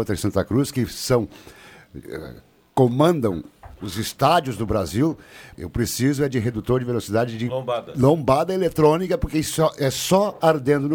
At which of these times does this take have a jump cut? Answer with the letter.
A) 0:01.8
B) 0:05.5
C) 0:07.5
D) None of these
B